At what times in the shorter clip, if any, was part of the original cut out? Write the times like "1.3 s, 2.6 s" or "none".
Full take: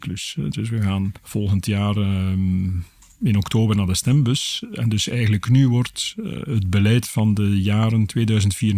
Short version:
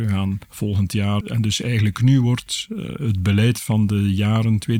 1.2 s